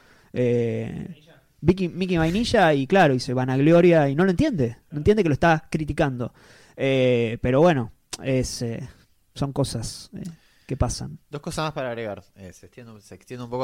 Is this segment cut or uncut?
uncut